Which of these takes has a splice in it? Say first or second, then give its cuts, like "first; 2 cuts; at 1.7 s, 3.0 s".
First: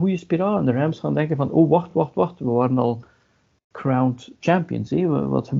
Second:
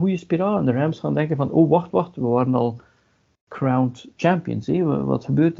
second; 1 cut; at 1.9 s